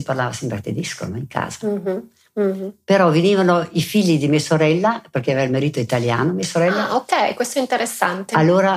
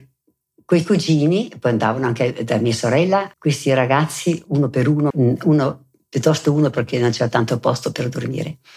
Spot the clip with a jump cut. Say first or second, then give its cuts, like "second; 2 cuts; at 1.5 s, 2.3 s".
second; 2 cuts; at 3.3 s, 5.1 s